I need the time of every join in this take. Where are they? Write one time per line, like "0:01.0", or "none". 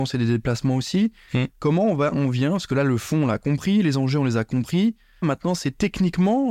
0:05.2